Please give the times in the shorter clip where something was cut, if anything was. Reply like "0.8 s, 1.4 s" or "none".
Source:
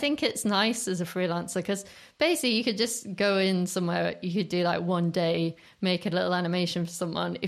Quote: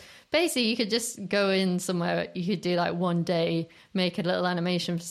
none